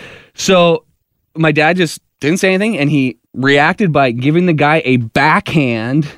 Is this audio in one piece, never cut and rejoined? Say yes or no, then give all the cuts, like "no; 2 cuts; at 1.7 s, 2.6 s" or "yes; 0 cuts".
no; 1 cut; at 3.2 s